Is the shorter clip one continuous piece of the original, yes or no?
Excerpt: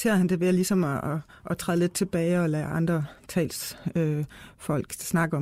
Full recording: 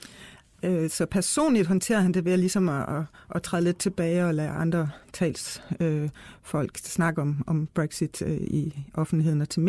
yes